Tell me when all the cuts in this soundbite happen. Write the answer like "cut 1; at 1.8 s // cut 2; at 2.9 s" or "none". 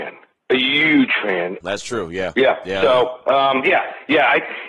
cut 1; at 1.6 s

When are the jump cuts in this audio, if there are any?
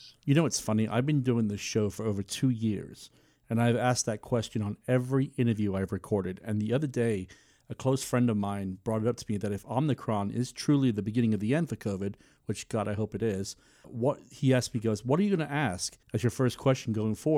cut 1; at 13.8 s // cut 2; at 16.0 s

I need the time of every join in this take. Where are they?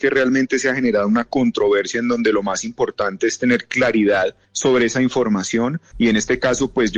cut 1; at 4.4 s // cut 2; at 5.9 s

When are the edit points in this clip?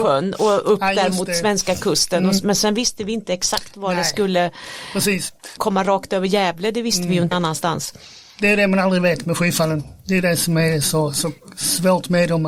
cut 1; at 5.6 s // cut 2; at 7.3 s

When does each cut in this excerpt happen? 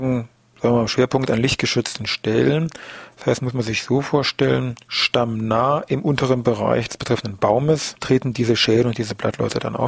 none

